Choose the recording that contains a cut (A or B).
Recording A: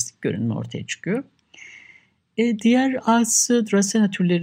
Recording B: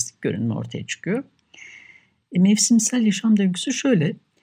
B